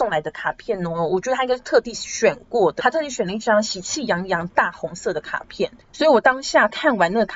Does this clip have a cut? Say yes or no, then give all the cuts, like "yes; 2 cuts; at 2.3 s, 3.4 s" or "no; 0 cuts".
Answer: yes; 1 cut; at 2.8 s